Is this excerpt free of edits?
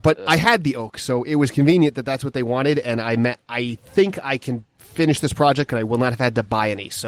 no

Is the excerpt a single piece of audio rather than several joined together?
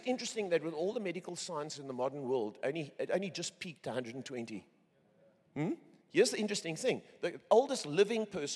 yes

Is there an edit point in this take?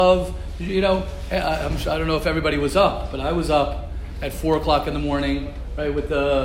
no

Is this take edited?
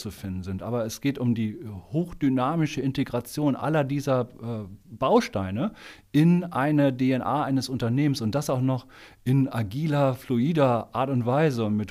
no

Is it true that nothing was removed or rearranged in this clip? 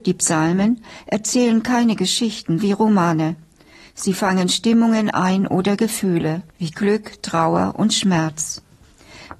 no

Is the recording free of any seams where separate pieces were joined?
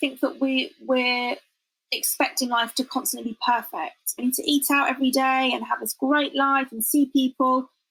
no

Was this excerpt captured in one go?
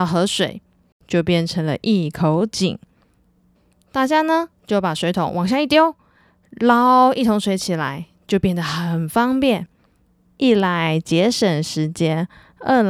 yes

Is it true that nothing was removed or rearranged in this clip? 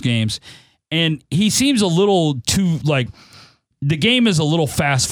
yes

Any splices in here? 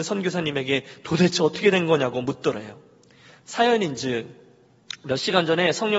no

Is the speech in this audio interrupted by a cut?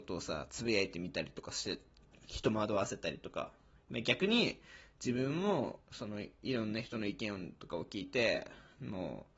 no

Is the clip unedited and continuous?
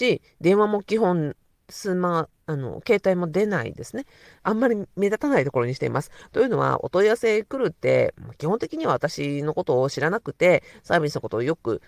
no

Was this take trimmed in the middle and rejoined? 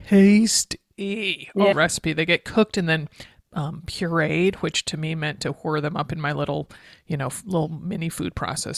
yes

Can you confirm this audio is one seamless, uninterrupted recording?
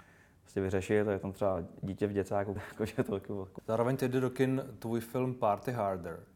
no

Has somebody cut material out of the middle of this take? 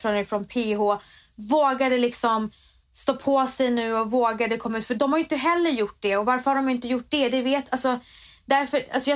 no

